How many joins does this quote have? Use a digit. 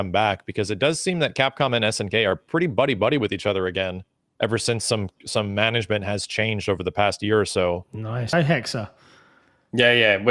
1